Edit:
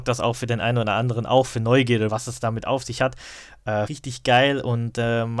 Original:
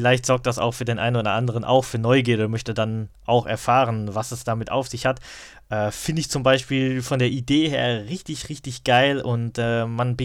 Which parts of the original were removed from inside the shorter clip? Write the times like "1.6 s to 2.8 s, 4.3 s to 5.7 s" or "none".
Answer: 2.5 s to 4.1 s, 5.9 s to 8.5 s